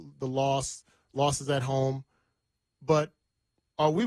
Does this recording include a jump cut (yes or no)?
no